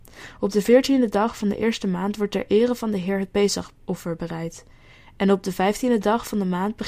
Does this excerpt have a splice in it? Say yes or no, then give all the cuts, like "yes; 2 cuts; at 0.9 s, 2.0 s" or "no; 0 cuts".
no; 0 cuts